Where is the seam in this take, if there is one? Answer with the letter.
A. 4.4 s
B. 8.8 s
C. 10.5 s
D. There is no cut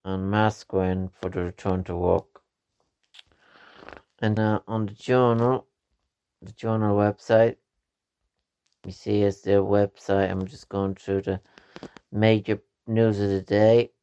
A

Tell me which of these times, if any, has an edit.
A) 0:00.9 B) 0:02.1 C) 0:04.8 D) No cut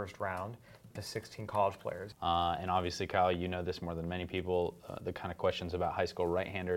B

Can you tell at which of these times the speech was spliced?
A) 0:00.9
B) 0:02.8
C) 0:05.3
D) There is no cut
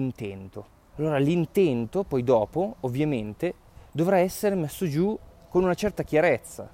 A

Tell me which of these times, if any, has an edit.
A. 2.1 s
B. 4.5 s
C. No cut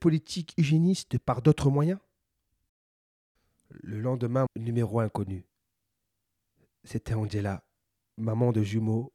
B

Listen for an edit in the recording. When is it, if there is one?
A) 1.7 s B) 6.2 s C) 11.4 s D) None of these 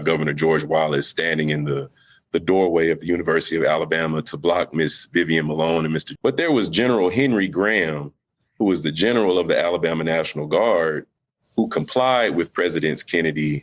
B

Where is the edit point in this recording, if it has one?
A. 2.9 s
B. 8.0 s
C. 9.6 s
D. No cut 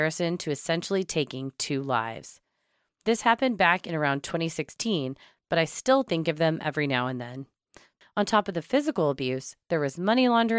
B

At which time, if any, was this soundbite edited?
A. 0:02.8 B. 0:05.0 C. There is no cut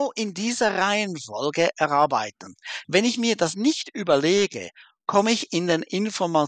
A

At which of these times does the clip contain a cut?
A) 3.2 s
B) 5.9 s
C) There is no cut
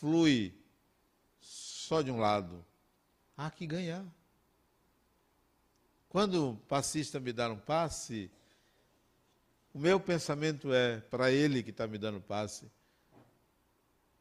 A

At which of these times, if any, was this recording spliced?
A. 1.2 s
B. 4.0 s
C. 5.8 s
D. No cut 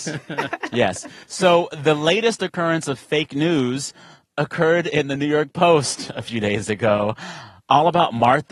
D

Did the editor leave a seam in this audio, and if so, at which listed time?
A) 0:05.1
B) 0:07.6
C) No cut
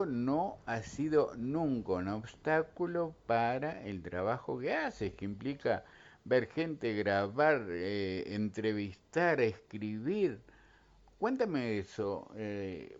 C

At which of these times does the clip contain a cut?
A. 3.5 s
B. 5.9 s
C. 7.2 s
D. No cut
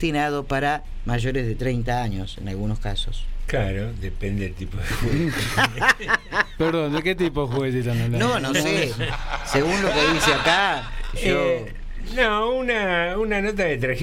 D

